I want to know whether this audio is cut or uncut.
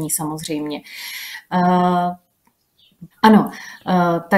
cut